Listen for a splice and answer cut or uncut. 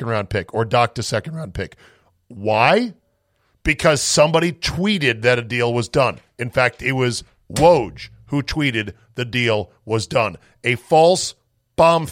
uncut